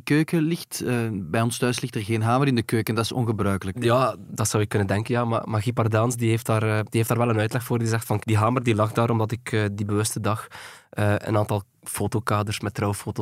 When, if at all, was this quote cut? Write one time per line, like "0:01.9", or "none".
0:08.2